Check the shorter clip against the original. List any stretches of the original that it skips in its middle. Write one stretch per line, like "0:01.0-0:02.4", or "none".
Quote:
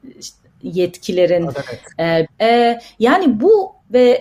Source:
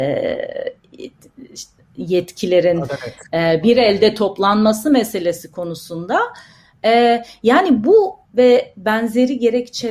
0:03.6-0:06.7